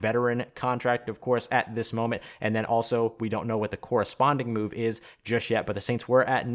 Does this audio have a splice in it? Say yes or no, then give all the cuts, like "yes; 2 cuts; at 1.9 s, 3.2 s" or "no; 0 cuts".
no; 0 cuts